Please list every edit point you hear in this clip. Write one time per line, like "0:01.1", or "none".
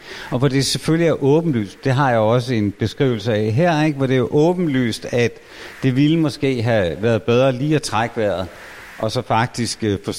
none